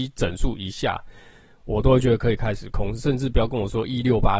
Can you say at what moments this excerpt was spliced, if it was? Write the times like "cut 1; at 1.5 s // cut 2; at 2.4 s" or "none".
none